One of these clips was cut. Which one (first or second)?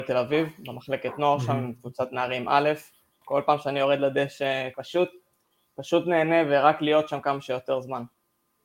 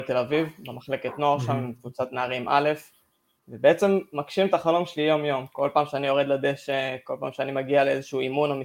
first